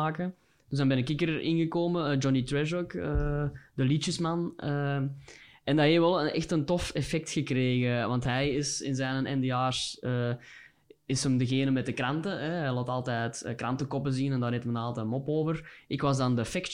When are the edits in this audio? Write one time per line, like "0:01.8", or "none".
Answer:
none